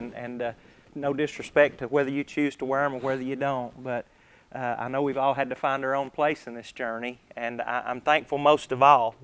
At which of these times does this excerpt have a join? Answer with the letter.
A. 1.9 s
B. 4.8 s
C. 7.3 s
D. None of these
D